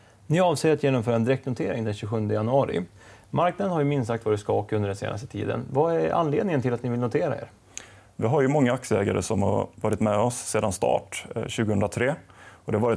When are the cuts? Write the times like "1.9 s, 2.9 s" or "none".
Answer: none

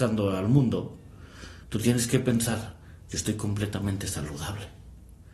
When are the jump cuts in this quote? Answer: none

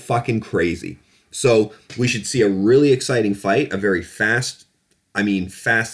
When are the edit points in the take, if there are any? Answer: none

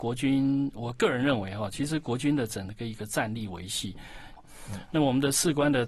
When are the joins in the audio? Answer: 4.4 s

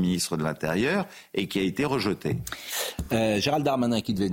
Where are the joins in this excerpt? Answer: none

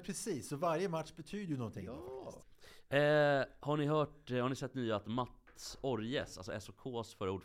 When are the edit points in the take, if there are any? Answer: none

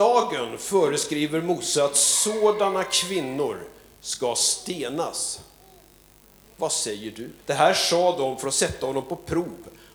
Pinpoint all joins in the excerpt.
7.4 s

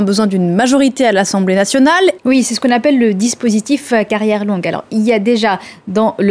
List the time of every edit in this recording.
2.2 s

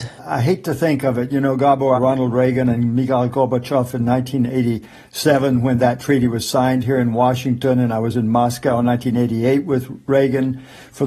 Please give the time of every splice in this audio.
2.0 s

